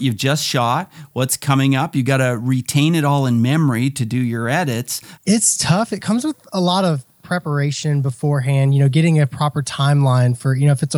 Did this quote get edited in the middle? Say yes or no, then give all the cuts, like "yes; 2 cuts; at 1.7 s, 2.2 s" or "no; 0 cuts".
yes; 1 cut; at 5.2 s